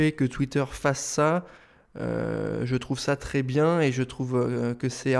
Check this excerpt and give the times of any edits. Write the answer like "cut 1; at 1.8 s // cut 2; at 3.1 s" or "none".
none